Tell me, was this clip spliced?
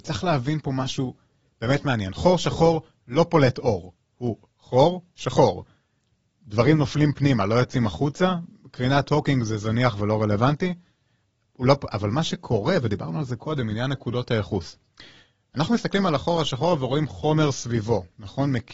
no; 0 cuts

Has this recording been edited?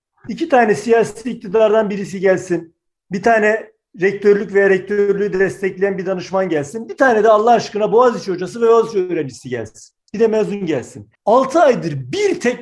yes; 1 cut; at 11.2 s

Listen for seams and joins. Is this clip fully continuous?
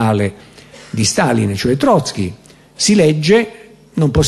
yes; 0 cuts

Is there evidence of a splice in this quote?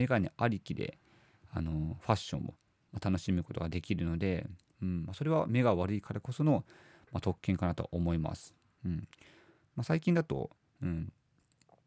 yes; 2 cuts; at 8.8 s, 10.7 s

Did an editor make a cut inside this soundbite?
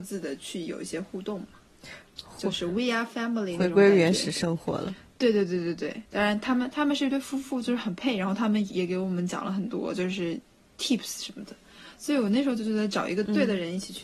yes; 1 cut; at 8.7 s

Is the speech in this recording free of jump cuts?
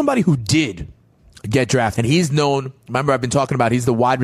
no; 1 cut; at 2.0 s

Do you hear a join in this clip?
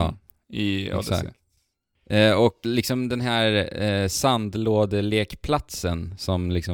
yes; 1 cut; at 2.6 s

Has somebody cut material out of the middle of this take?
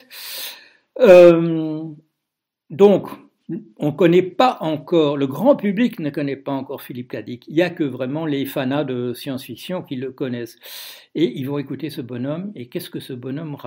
no; 0 cuts

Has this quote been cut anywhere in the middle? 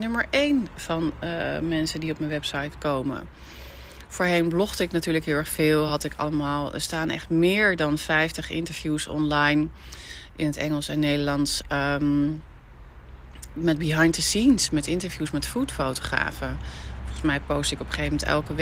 no; 0 cuts

